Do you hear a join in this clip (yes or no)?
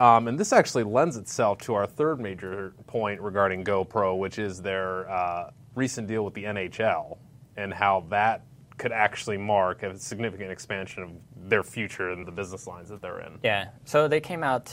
yes